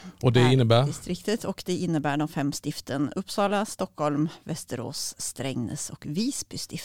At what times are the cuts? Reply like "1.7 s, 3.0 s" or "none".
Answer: none